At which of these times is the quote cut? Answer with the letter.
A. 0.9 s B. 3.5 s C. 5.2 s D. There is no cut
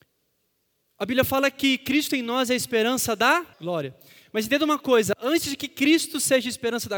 B